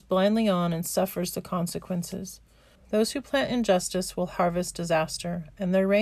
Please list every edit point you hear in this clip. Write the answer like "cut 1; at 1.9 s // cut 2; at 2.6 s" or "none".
cut 1; at 2.7 s